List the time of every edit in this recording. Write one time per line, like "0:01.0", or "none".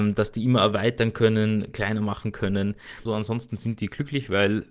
0:03.1